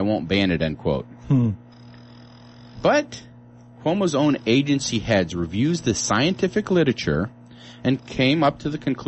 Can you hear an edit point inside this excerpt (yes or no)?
yes